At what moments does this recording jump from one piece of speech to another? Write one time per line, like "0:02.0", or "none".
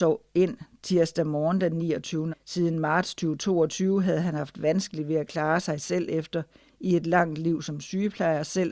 0:02.3

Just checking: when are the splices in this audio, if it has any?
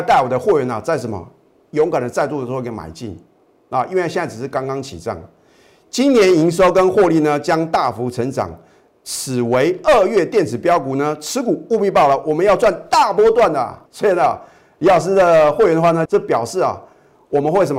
0:13.9
0:16.1

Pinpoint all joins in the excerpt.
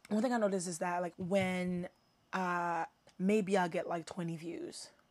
0:01.1
0:03.1

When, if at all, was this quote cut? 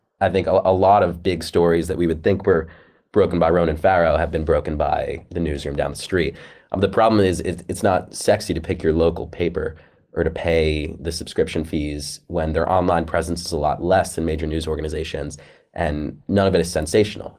none

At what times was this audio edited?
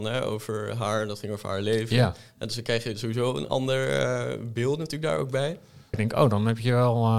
0:05.9

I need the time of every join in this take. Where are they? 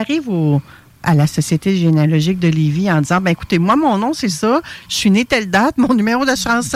none

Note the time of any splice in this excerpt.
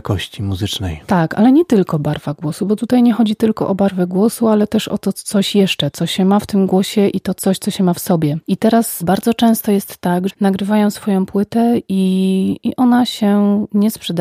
0:05.9
0:10.3

